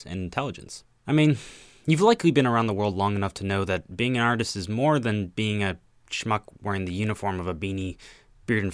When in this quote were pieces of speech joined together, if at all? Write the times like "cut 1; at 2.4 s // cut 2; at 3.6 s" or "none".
cut 1; at 1.0 s